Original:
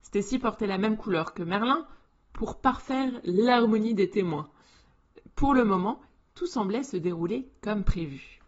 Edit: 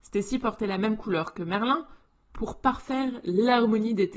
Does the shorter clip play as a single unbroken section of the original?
yes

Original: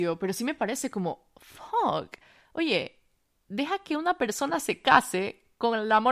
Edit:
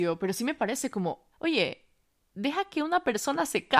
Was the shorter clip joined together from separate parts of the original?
yes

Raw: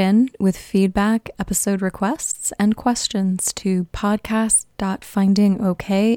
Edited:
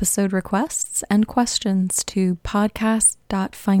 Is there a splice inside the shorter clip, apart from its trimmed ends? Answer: no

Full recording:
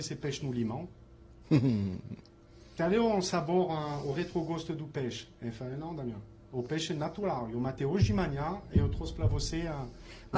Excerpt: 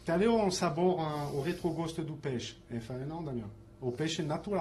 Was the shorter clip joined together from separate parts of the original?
no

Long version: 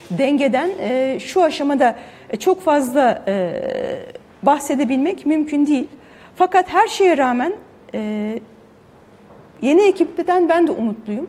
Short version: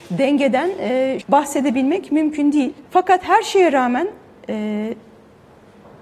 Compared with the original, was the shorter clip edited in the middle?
yes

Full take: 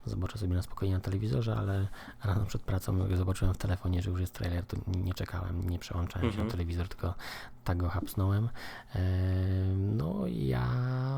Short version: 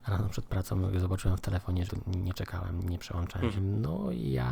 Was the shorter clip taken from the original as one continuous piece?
no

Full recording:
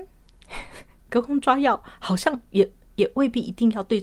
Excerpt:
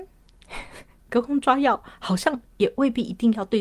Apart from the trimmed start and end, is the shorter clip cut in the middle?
yes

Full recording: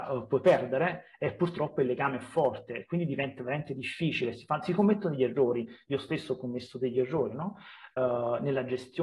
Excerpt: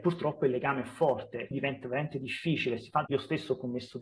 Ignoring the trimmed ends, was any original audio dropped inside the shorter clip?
yes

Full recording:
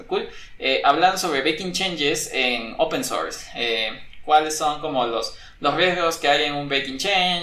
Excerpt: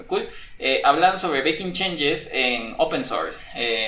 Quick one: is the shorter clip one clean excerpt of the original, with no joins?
yes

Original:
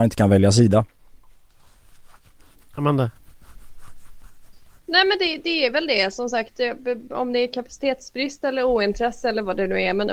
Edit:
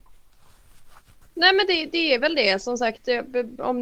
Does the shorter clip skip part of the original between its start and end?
yes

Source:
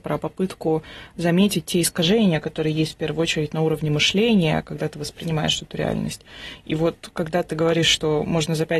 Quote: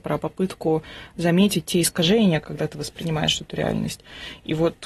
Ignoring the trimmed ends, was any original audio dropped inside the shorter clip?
yes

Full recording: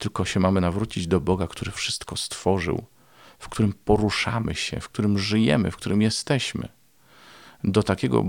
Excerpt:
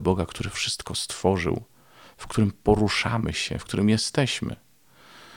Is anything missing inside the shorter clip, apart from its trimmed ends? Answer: yes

